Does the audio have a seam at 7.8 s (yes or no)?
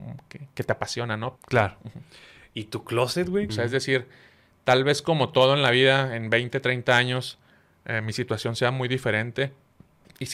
no